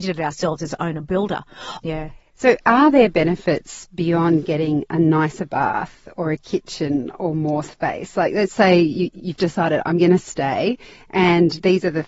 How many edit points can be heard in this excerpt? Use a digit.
1